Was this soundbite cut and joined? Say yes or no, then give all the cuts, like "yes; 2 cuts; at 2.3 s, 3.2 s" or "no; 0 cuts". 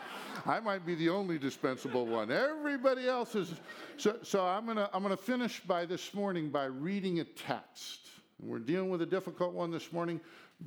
no; 0 cuts